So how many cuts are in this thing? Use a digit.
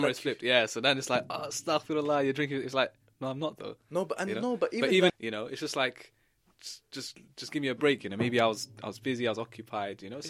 1